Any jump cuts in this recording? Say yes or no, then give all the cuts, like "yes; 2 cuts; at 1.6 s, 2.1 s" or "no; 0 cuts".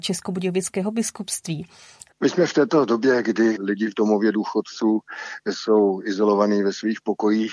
yes; 1 cut; at 2.1 s